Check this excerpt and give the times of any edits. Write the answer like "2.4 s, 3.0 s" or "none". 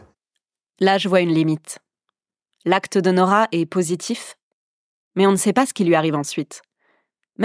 none